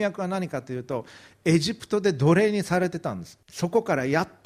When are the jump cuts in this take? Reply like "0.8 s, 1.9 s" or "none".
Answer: 3.4 s